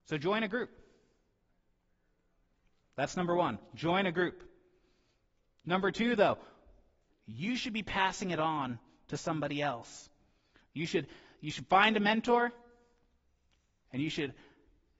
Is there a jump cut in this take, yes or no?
yes